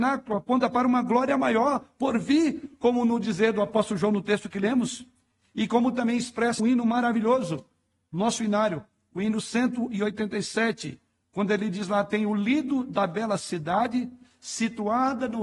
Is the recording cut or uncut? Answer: cut